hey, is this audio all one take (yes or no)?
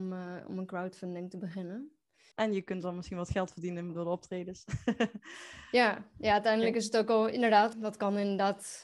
no